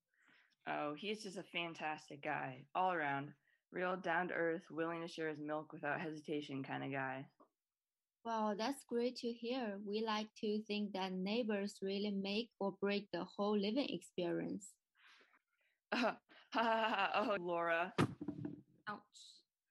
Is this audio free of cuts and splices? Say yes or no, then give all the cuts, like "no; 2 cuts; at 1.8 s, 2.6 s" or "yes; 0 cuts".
no; 2 cuts; at 15.4 s, 17.4 s